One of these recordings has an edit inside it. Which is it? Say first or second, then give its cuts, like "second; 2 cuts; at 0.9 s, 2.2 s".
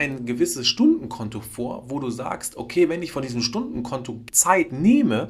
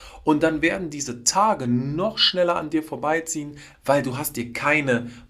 second; 1 cut; at 3.7 s